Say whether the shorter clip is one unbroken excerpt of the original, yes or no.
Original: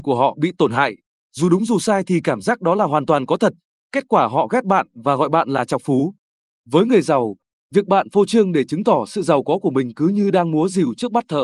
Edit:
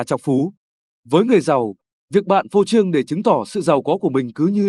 yes